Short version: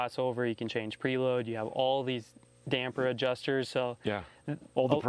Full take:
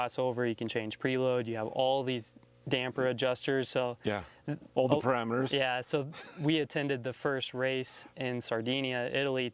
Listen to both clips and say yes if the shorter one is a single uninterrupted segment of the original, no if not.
yes